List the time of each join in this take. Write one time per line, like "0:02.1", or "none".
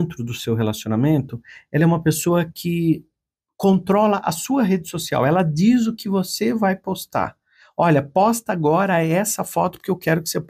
none